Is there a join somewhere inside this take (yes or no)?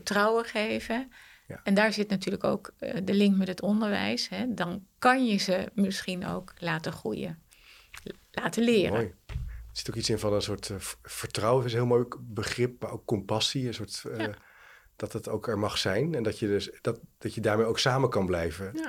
no